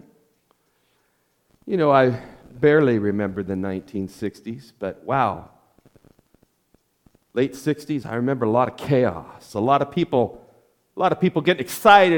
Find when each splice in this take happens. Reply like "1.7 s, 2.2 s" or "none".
8.0 s

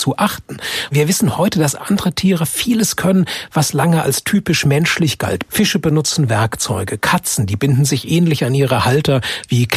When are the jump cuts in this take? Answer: 5.5 s

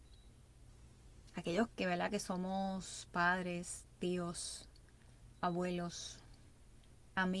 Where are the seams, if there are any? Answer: 1.7 s

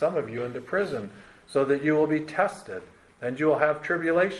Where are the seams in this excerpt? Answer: none

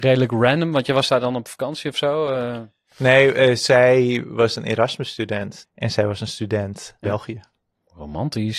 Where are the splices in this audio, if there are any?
5.6 s, 7.0 s

